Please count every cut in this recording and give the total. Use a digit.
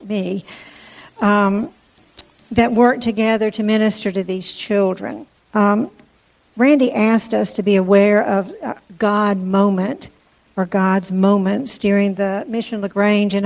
1